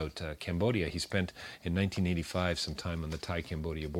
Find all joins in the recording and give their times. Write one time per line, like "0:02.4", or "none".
none